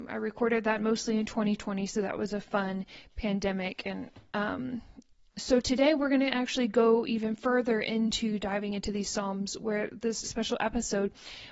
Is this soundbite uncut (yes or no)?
no